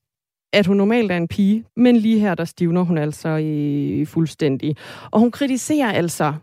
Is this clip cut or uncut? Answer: cut